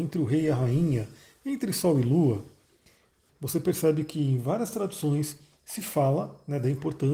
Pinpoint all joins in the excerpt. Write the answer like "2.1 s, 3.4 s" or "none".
3.3 s